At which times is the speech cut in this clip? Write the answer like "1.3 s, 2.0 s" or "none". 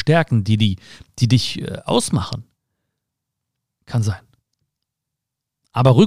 3.8 s